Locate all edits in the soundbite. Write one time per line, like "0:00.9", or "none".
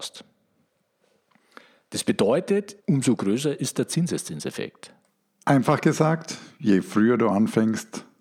0:02.8

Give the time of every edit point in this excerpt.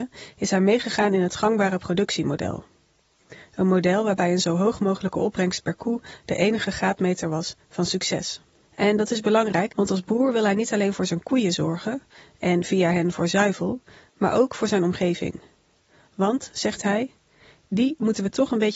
0:08.6
0:09.7

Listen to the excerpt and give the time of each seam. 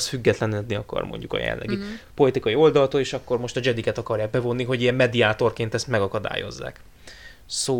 none

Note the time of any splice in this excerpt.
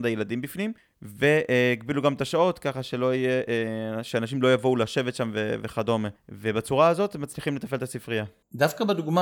none

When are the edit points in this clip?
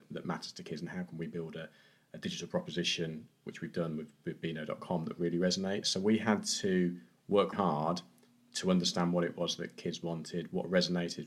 0:05.8
0:07.5

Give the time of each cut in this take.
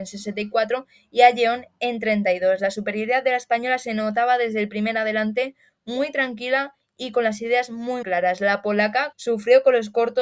0:08.0
0:09.1

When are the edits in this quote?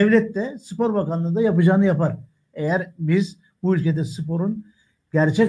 none

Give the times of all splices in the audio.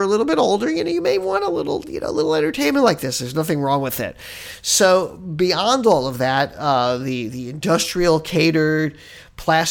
0:07.3

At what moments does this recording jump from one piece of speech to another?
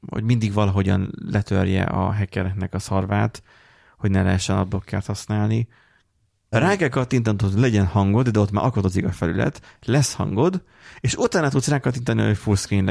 0:06.5

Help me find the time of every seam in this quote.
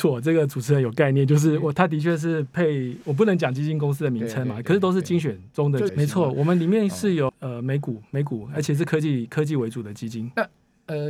0:05.9
0:07.3

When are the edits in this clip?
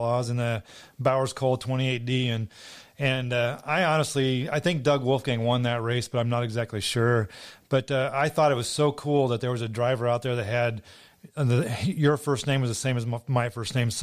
none

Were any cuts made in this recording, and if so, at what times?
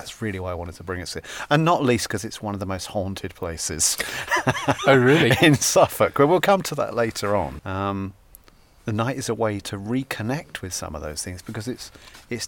0:07.6
0:09.6

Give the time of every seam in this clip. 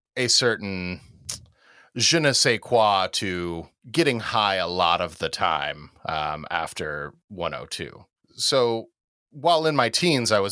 none

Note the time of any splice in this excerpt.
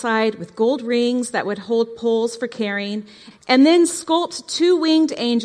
0:03.3

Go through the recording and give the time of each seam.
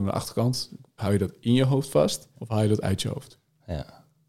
0:01.0
0:02.3

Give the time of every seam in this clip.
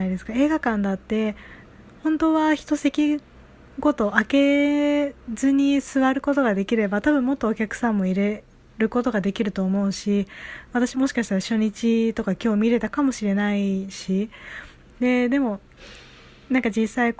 0:10.9

